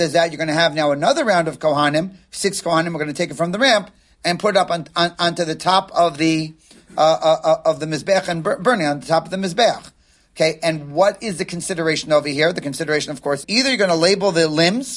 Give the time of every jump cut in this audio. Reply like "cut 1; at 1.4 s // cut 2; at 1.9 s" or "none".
cut 1; at 13.4 s